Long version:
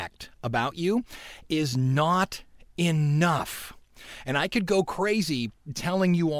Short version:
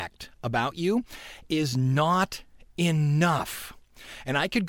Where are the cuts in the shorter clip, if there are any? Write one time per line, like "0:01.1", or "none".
none